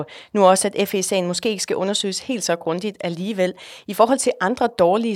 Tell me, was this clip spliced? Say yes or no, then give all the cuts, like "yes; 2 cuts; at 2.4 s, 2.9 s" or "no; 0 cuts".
no; 0 cuts